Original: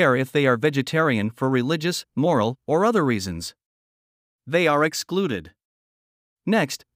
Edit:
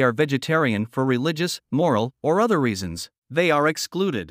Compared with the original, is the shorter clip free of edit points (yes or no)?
no